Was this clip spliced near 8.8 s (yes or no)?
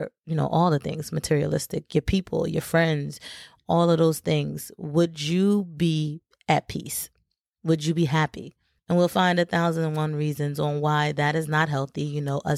yes